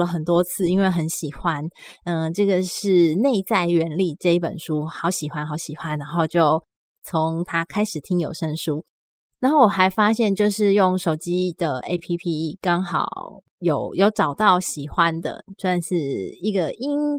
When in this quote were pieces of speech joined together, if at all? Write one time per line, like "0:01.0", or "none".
none